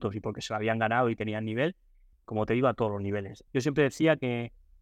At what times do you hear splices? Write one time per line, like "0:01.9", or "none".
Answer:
0:02.1
0:03.5